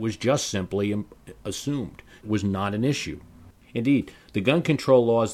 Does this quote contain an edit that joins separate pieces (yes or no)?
yes